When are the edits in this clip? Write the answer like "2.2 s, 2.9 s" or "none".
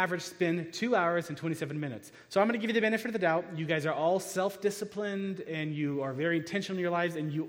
none

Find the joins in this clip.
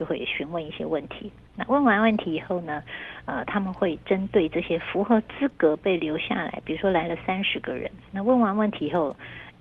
none

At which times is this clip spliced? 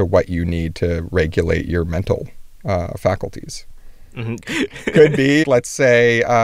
4.4 s, 5.4 s

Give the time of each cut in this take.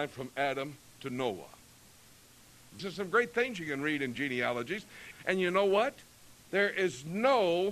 2.8 s, 5.1 s

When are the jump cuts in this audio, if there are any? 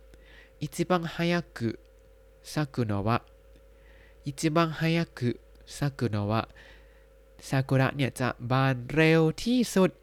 none

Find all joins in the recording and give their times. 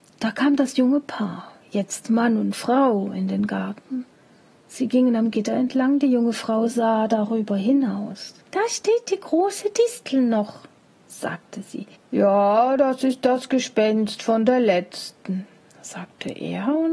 8.4 s, 12.0 s

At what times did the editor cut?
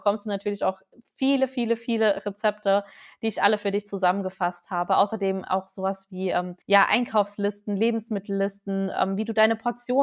6.6 s

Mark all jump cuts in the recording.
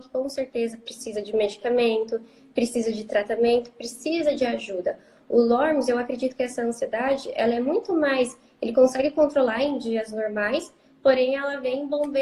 none

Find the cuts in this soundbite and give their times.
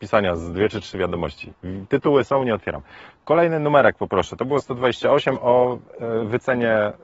none

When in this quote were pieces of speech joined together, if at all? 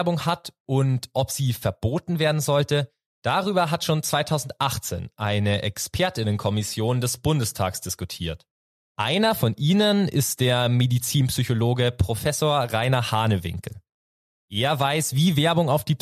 8.8 s

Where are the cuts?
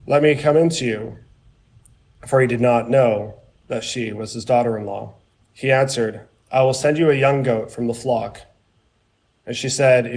5.4 s

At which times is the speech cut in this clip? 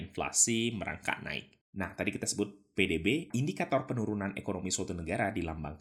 none

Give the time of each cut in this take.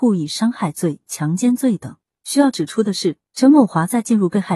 2.2 s, 3.2 s

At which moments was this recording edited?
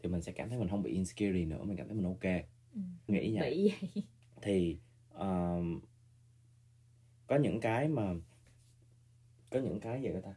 3.1 s

